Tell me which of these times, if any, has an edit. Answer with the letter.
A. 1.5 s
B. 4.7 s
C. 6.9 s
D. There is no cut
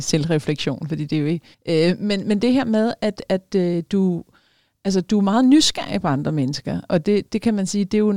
A